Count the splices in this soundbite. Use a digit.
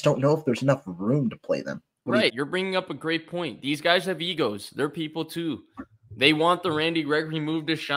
1